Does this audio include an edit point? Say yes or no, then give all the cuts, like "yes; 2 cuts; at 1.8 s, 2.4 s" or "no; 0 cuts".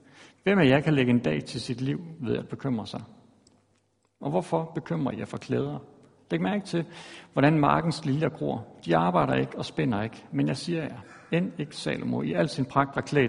no; 0 cuts